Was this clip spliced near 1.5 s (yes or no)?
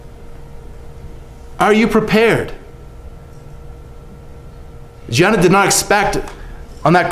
yes